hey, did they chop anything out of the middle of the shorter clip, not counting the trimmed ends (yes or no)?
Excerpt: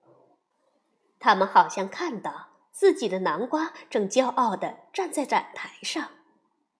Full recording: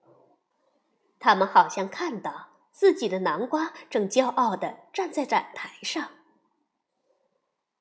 no